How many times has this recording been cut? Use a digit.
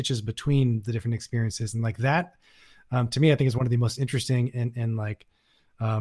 0